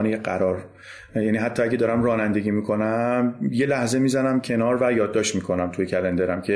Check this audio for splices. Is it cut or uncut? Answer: uncut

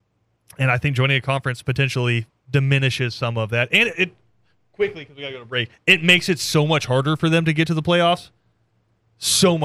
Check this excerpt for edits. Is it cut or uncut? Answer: uncut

